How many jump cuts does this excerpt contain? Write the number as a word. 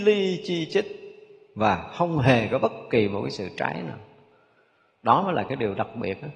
zero